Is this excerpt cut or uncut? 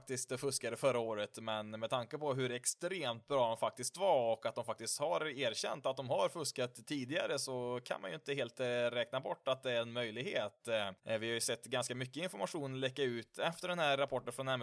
cut